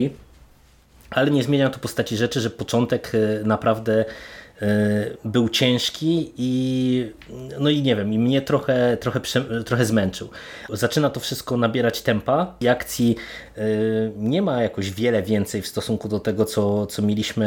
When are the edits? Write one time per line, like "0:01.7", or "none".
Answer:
0:10.7
0:12.6

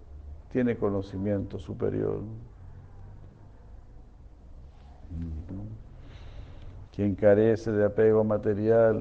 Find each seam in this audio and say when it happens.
0:05.5
0:06.8

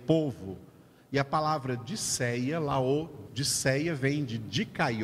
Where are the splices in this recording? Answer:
0:03.3

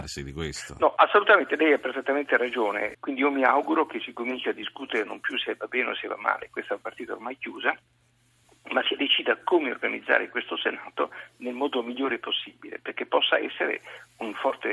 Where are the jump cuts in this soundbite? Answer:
0:02.9

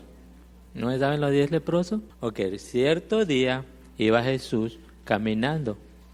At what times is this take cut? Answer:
0:02.1

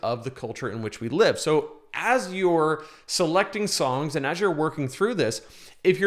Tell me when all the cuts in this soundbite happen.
none

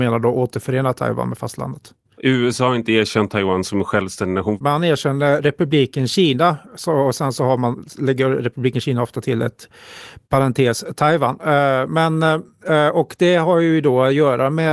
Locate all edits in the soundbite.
0:02.2
0:04.6

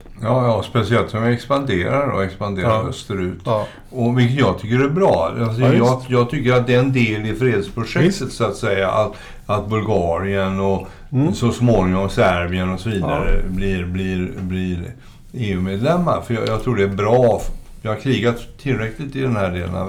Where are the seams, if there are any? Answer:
none

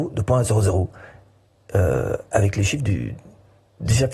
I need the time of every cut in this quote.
none

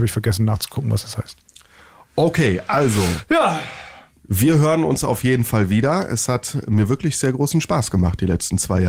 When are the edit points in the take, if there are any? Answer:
none

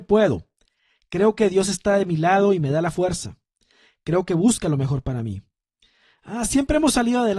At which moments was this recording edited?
none

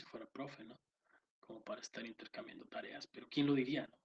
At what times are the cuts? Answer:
none

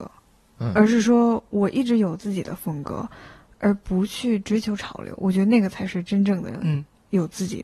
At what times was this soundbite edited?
none

